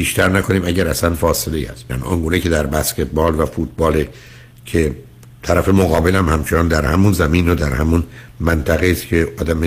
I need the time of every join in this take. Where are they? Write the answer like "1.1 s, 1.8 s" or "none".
1.9 s